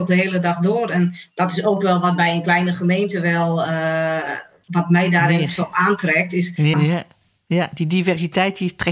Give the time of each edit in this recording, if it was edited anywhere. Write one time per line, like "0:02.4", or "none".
0:06.7